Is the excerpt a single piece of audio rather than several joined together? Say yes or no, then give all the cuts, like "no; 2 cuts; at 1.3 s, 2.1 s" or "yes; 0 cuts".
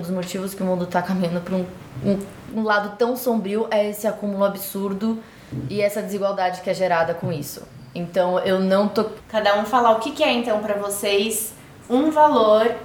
no; 1 cut; at 9.2 s